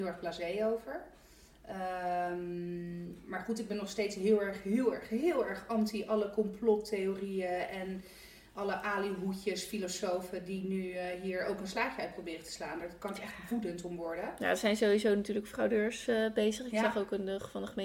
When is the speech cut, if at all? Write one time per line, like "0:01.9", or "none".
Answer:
none